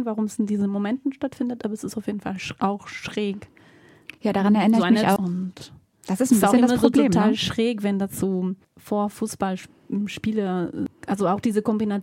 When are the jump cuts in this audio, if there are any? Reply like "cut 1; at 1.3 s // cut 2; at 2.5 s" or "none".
cut 1; at 5.2 s // cut 2; at 8.6 s